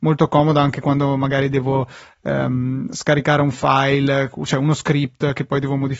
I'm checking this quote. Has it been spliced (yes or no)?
no